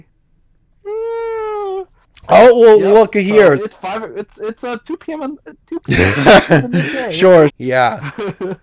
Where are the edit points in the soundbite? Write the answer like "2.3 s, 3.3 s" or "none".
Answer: 3.6 s, 7.5 s